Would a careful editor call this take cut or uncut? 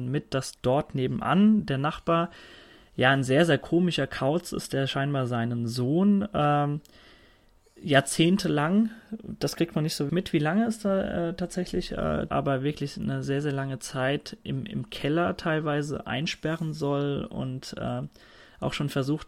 cut